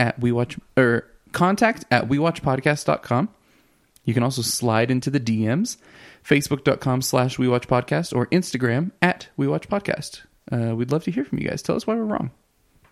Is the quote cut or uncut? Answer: uncut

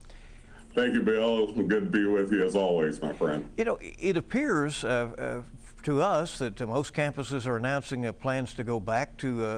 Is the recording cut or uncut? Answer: uncut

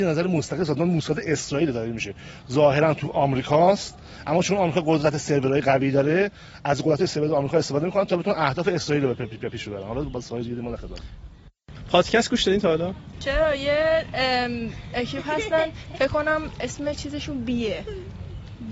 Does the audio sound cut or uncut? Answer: cut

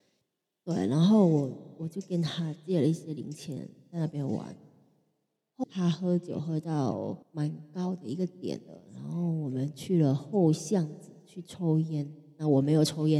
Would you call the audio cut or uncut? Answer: cut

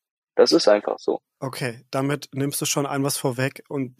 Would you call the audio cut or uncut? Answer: uncut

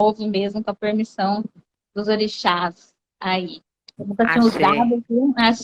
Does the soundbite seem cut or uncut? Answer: cut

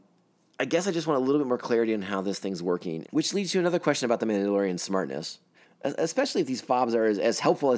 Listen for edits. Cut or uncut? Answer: cut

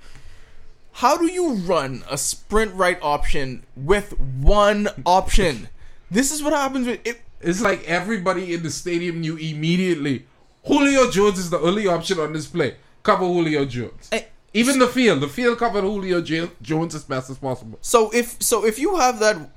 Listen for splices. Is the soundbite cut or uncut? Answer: uncut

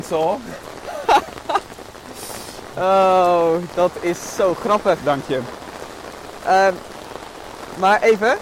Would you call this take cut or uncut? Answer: uncut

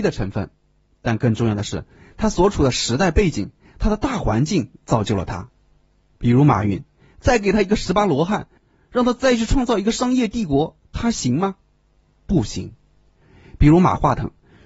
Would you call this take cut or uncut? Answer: uncut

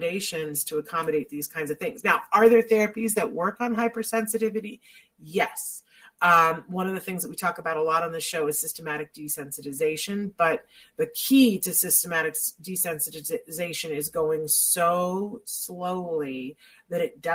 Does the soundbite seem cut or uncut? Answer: uncut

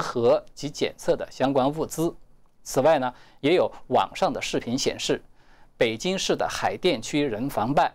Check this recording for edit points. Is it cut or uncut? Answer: cut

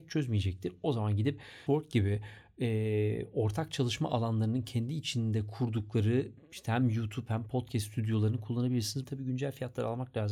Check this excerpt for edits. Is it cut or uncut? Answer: cut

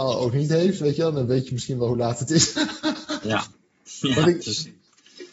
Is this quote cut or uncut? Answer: uncut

